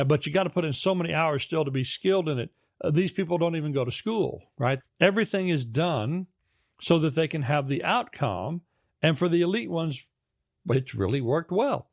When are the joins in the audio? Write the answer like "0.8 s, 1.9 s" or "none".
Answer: 4.8 s